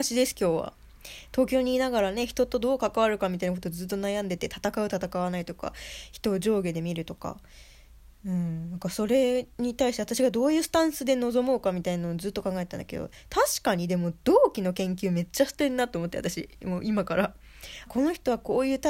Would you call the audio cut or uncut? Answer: cut